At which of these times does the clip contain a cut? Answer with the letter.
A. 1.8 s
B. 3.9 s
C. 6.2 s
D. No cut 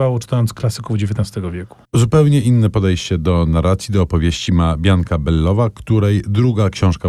A